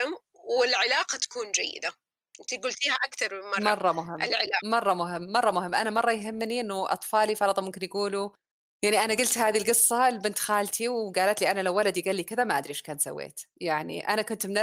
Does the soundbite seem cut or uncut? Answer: uncut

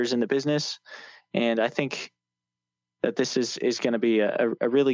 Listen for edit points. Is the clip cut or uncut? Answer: uncut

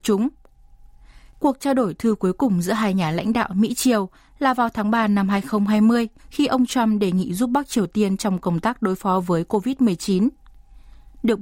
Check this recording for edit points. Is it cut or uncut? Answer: cut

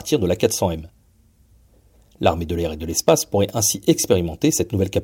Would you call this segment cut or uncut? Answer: uncut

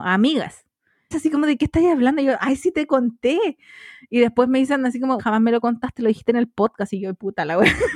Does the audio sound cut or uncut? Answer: cut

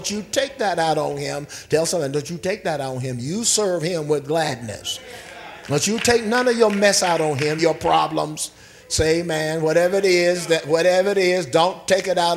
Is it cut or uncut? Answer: cut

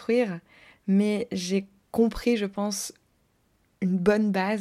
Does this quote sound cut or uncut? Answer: uncut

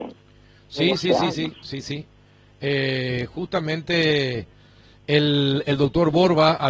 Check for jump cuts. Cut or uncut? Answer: uncut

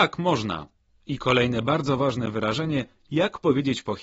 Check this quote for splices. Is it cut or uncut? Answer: uncut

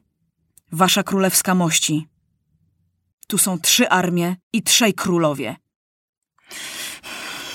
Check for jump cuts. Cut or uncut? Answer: cut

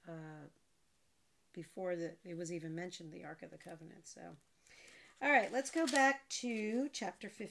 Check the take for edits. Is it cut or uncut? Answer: uncut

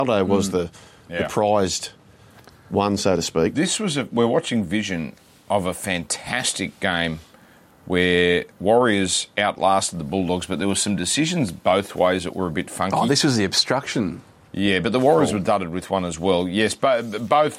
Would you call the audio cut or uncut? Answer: uncut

